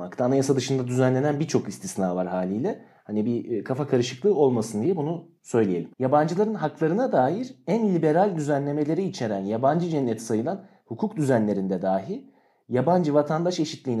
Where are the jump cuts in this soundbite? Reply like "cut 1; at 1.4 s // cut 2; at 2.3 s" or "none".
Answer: cut 1; at 5.9 s